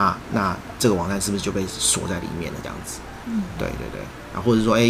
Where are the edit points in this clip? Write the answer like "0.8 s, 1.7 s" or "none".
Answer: none